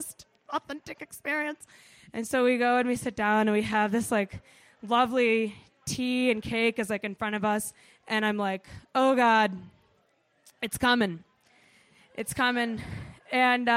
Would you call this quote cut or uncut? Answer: uncut